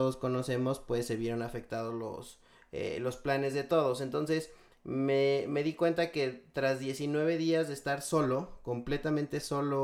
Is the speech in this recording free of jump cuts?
yes; 0 cuts

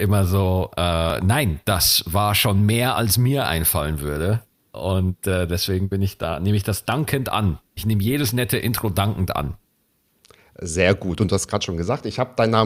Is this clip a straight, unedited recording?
yes; 0 cuts

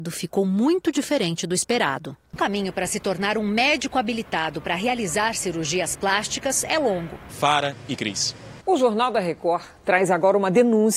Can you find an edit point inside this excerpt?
yes; 3 cuts; at 2.4 s, 7.3 s, 8.6 s

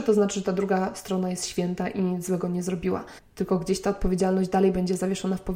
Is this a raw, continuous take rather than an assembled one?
no; 1 cut; at 3.2 s

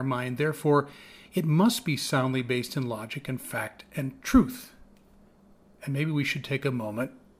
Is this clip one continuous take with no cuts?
yes; 0 cuts

